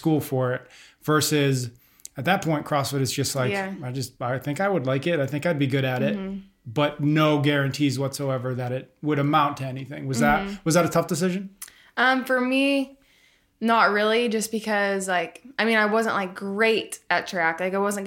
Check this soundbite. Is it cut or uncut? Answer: uncut